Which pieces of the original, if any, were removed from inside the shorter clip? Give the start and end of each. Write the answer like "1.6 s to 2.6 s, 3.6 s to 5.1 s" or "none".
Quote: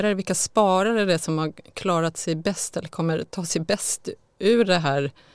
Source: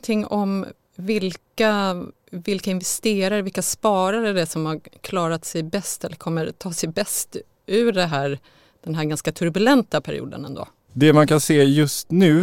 none